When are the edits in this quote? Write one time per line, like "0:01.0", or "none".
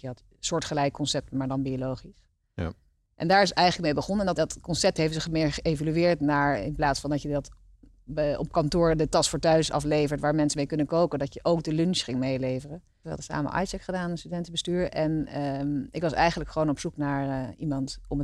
0:04.4
0:13.0